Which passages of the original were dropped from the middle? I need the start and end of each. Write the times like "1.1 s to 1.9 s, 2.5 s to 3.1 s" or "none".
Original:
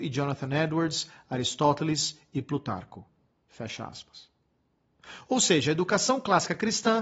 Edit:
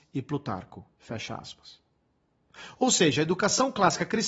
3.1 s to 3.4 s

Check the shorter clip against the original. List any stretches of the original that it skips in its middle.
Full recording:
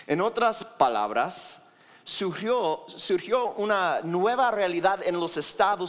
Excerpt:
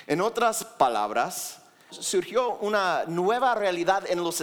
1.9 s to 2.9 s

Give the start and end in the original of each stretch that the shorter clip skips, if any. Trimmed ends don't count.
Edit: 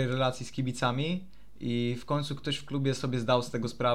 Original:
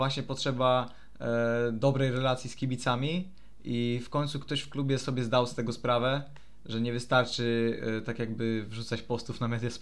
none

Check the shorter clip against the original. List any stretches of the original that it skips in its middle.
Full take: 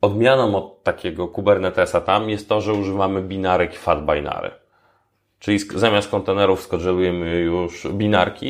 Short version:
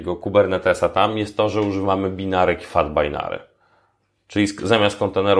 none

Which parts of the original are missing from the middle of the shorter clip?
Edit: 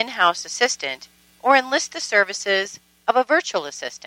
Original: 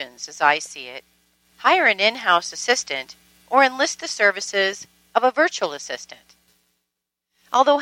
none

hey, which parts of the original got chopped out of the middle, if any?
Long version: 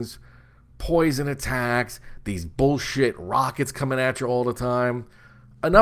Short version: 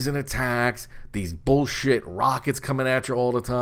none

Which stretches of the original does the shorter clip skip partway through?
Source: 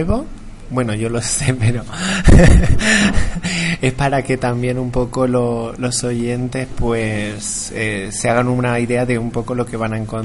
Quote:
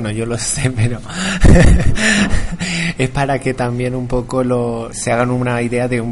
5.8 s to 8.1 s

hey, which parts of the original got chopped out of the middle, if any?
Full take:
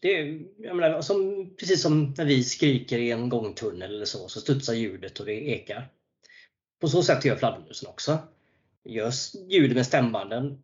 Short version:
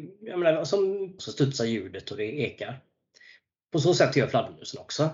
1.6 s to 4.3 s

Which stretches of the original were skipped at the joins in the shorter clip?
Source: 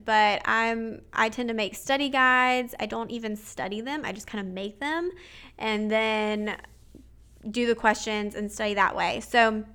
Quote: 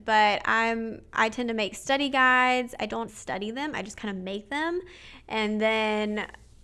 3.1 s to 3.4 s

